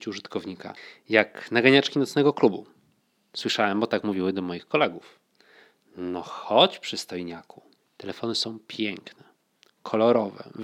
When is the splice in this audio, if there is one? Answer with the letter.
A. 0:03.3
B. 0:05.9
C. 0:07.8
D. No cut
C